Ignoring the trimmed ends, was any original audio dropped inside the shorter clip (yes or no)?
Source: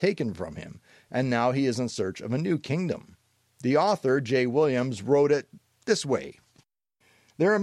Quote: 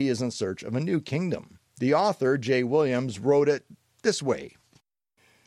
yes